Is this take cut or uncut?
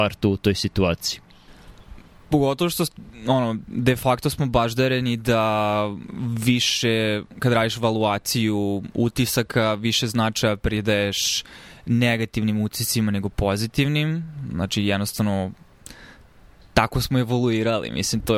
uncut